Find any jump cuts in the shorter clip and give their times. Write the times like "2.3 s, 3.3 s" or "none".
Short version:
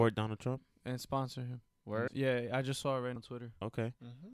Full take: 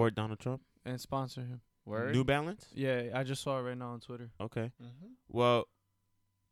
2.1 s, 3.2 s